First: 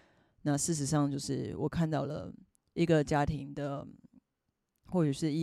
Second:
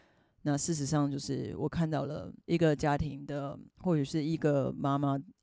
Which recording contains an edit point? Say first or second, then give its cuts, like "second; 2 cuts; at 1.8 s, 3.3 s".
second; 2 cuts; at 2.4 s, 3.7 s